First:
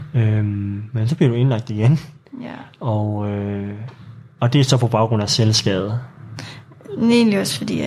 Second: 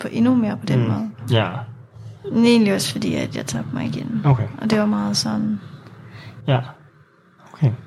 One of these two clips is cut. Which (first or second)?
second